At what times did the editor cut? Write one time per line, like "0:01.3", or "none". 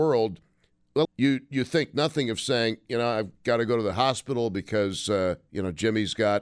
0:01.1